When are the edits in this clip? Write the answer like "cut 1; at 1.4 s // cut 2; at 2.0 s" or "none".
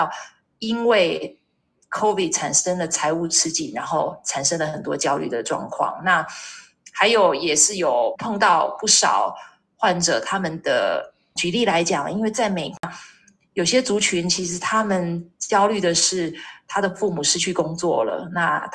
cut 1; at 8.2 s // cut 2; at 11.4 s